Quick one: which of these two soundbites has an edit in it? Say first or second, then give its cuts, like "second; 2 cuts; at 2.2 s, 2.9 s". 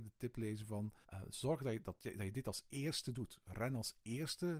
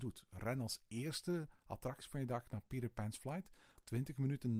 first; 1 cut; at 1.0 s